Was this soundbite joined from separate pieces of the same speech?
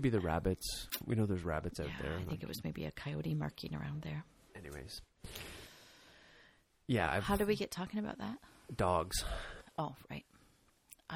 no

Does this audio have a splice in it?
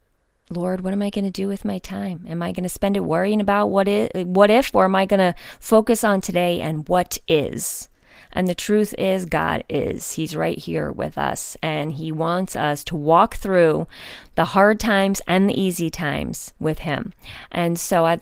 yes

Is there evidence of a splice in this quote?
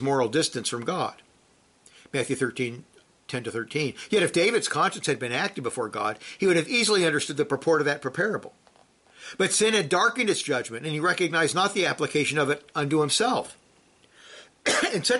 no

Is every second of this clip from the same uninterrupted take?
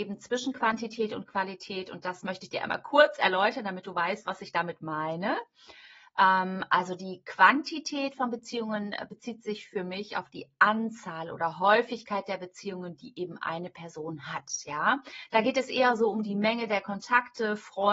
yes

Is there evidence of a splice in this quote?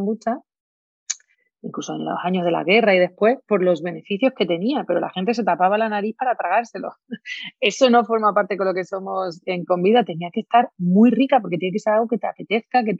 no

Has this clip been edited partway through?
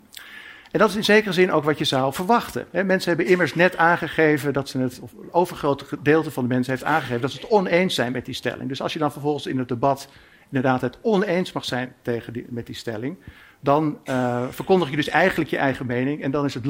no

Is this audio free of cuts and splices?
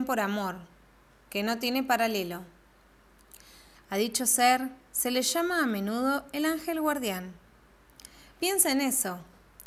no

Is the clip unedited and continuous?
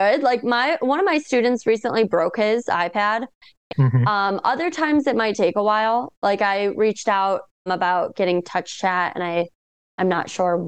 no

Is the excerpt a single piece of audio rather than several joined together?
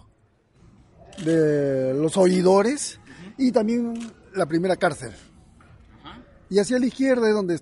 yes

